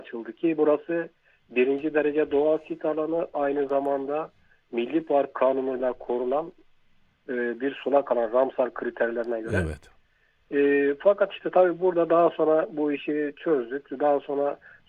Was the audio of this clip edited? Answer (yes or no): no